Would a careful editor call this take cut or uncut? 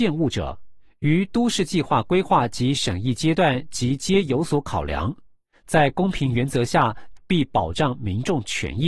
cut